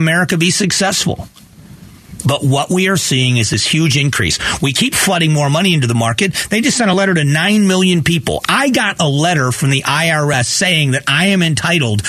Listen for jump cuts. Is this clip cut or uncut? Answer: uncut